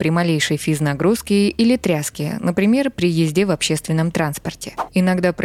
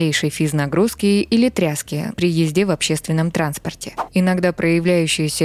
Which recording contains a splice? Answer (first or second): second